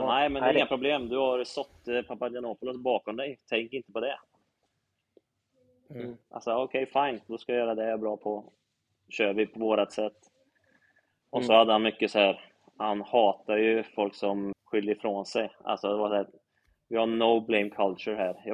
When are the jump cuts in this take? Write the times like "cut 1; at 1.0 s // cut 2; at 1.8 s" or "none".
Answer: cut 1; at 14.5 s

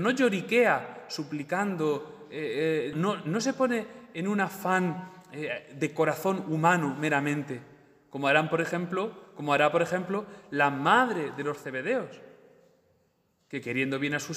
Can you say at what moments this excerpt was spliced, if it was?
cut 1; at 2.9 s

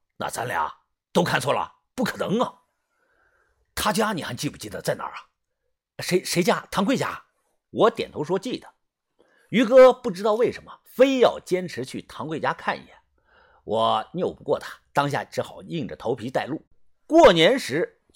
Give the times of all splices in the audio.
none

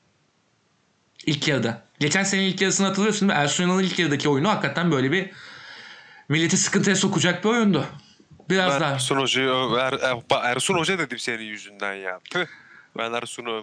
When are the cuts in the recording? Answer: none

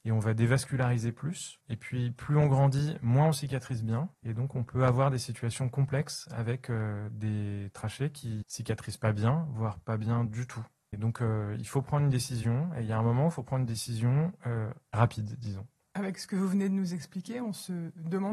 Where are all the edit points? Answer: cut 1; at 4.1 s

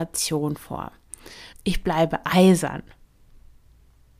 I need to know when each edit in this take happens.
cut 1; at 1.5 s

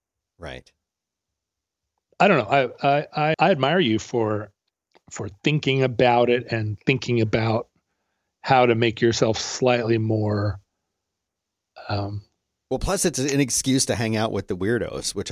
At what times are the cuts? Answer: cut 1; at 3.3 s

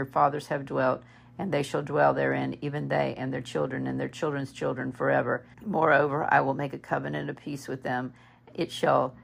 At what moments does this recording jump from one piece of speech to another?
cut 1; at 5.5 s

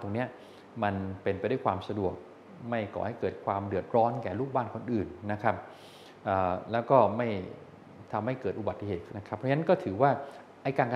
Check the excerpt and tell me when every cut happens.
cut 1; at 9.1 s

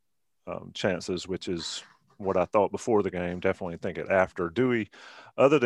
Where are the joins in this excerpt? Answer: none

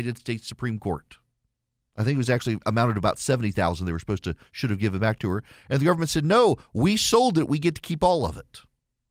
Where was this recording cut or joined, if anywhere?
cut 1; at 1.9 s

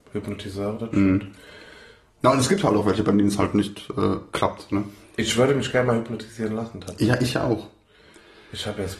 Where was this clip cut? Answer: none

